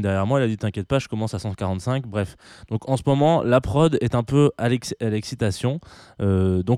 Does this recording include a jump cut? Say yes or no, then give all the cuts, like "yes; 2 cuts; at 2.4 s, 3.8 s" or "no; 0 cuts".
no; 0 cuts